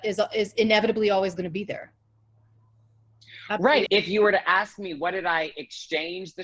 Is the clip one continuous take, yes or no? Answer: no